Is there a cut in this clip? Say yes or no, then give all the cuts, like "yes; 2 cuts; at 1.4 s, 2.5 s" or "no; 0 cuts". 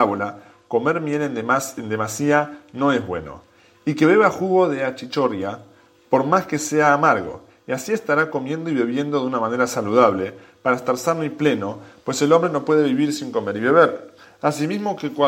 no; 0 cuts